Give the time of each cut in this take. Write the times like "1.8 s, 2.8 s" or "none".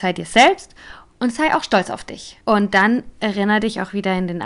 2.4 s